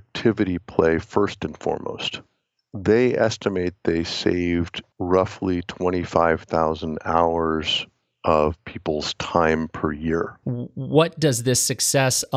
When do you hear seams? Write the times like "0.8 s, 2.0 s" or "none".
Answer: 4.9 s, 10.4 s